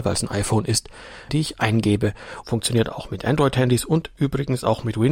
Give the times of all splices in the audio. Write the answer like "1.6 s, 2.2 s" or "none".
1.3 s, 2.4 s